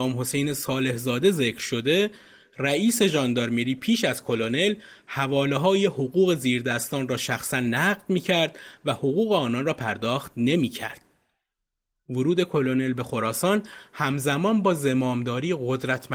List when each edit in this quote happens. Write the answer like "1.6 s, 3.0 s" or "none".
none